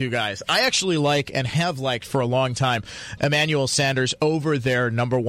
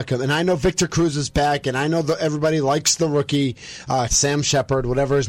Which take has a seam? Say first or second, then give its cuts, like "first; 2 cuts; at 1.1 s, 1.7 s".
second; 1 cut; at 4.1 s